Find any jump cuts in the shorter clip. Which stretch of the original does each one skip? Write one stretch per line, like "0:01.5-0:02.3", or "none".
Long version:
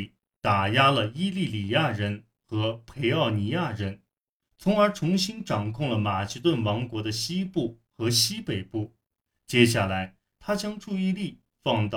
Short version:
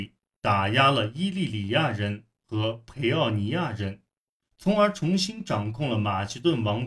none